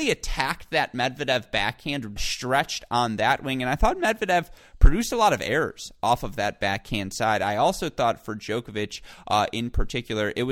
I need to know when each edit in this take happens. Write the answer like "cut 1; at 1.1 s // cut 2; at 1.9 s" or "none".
cut 1; at 2.2 s